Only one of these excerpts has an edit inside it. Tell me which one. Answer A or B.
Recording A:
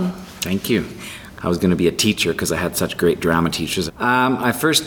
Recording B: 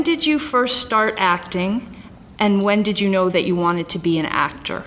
A